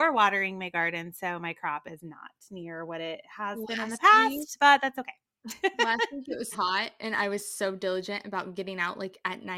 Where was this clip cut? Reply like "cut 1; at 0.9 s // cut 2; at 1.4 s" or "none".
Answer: cut 1; at 6.5 s